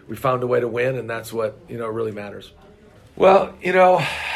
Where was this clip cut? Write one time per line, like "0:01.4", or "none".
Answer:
0:03.0